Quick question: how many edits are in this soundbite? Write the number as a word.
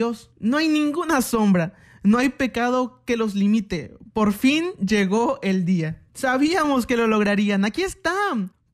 one